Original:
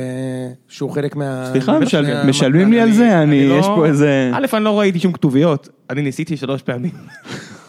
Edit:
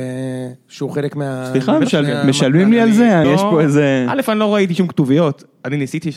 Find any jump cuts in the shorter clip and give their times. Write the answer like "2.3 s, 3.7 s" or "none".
3.2 s